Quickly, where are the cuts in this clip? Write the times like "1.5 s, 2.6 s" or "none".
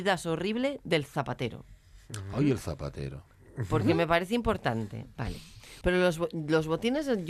5.8 s